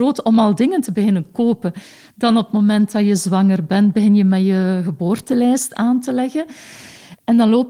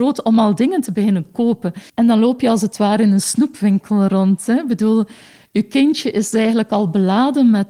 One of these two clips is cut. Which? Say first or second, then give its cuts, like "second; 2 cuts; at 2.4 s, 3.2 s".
second; 1 cut; at 1.9 s